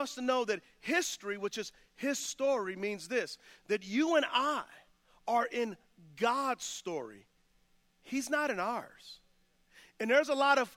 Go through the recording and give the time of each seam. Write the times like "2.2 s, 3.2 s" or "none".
none